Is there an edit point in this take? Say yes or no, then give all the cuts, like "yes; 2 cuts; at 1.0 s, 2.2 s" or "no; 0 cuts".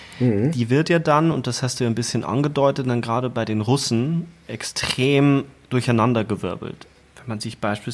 no; 0 cuts